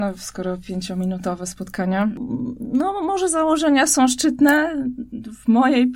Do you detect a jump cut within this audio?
no; 0 cuts

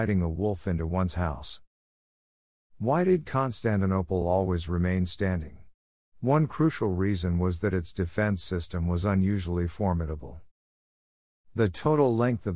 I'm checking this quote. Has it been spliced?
no; 0 cuts

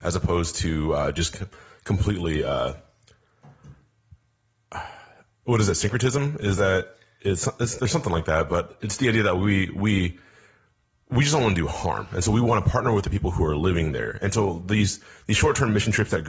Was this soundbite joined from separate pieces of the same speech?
no; 0 cuts

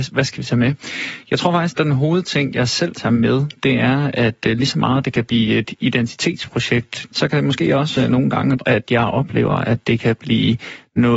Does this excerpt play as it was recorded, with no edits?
no; 3 cuts; at 1.7 s, 7.1 s, 8.6 s

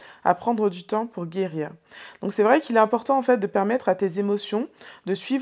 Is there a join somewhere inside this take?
no; 0 cuts

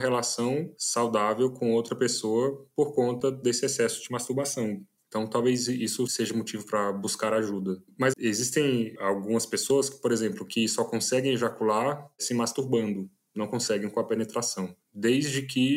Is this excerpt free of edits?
no; 2 cuts; at 8.1 s, 14.8 s

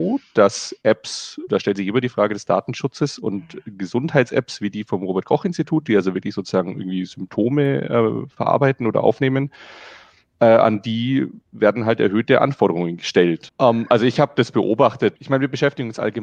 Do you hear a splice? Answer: yes; 3 cuts; at 1.5 s, 13.5 s, 15.2 s

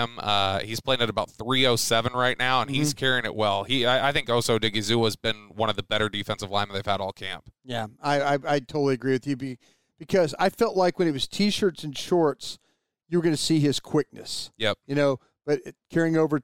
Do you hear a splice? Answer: no; 0 cuts

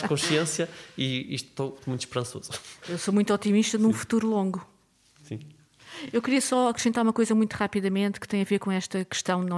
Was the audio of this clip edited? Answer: no; 0 cuts

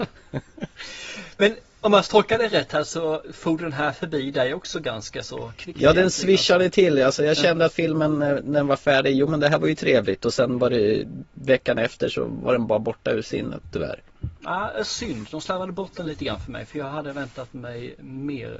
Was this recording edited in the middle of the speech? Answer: no; 0 cuts

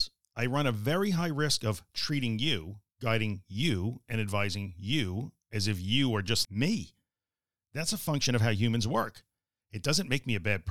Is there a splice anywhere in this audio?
yes; 1 cut; at 6.4 s

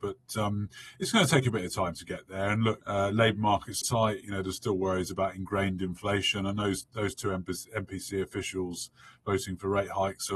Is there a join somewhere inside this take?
yes; 2 cuts; at 2.8 s, 3.8 s

